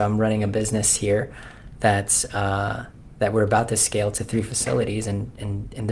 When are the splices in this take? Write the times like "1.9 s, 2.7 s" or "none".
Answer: none